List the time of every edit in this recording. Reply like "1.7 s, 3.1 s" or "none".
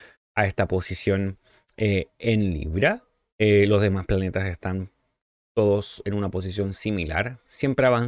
none